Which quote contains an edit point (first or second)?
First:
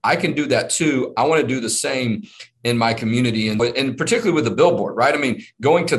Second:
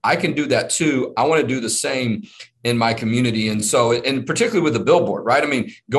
first